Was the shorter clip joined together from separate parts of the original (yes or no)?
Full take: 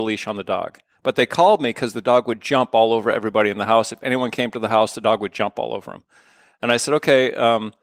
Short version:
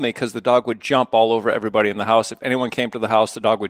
no